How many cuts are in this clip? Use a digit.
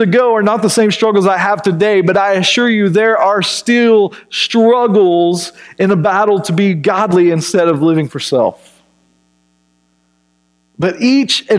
0